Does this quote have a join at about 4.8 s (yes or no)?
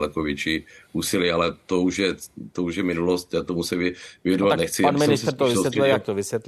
no